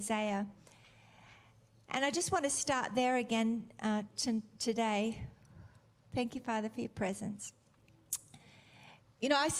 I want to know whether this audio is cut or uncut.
uncut